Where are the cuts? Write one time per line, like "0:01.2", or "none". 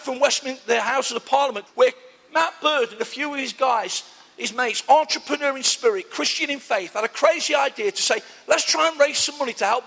0:01.7